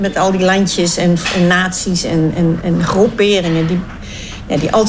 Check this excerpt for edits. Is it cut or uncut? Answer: cut